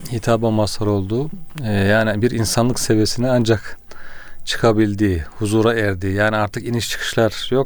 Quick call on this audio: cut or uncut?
uncut